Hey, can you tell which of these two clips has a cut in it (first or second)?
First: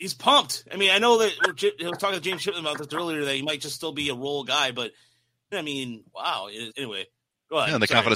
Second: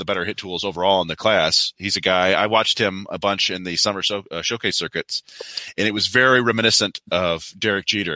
first